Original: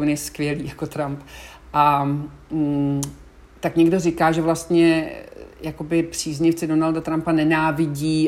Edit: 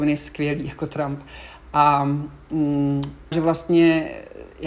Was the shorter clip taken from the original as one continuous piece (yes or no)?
no